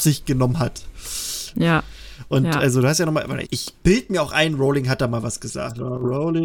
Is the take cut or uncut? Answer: cut